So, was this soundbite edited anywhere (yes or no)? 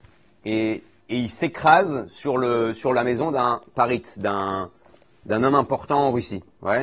no